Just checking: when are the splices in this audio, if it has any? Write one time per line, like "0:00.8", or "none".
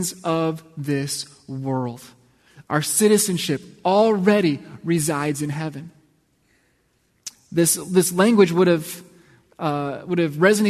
none